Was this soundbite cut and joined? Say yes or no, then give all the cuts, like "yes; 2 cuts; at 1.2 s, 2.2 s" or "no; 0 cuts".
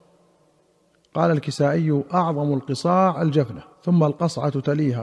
yes; 1 cut; at 3.7 s